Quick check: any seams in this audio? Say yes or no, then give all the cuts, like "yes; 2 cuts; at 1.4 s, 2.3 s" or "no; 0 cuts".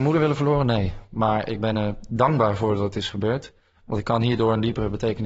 no; 0 cuts